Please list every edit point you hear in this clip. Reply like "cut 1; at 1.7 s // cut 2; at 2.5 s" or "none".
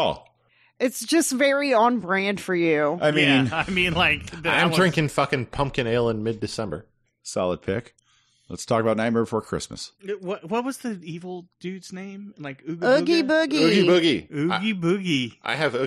none